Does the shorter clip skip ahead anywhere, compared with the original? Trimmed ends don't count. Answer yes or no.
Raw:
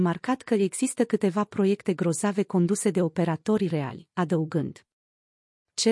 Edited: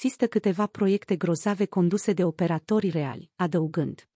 no